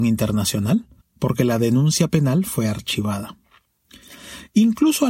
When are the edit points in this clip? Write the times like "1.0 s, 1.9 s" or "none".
1.0 s